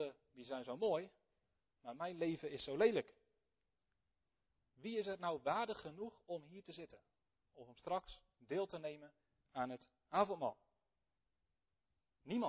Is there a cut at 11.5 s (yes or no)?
no